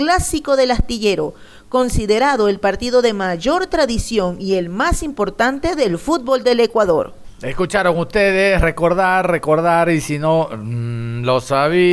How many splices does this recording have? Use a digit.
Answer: 0